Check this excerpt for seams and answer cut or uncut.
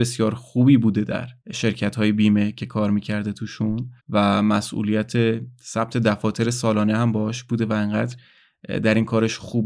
cut